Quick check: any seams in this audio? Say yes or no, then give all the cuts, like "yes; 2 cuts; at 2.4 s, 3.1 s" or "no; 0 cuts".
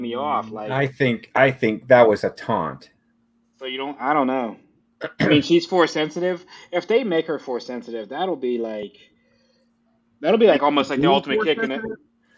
no; 0 cuts